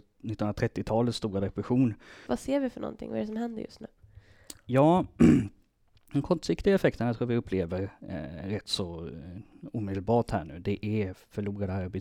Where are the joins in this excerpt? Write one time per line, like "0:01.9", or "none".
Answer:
0:02.3